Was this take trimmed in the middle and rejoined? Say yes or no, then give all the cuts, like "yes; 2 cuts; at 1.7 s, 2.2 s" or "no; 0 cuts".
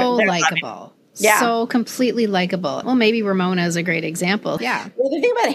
yes; 2 cuts; at 2.8 s, 4.6 s